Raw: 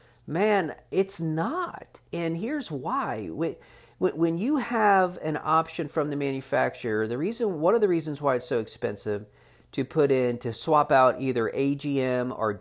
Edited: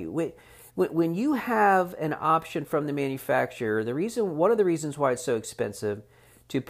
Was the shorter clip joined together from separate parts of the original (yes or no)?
no